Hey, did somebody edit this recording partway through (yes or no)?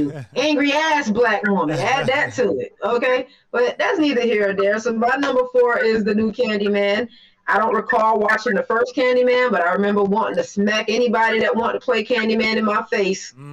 no